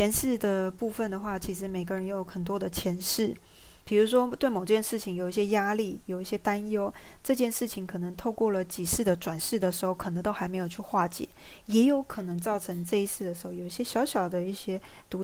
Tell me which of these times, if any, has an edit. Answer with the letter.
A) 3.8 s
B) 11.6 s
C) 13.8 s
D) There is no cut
A